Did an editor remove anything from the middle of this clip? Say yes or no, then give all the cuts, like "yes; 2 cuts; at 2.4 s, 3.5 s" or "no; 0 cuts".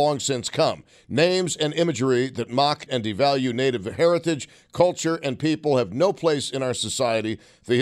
yes; 1 cut; at 2.9 s